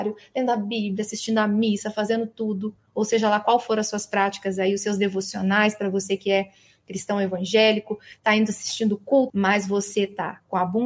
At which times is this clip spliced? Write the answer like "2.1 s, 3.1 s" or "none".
9.3 s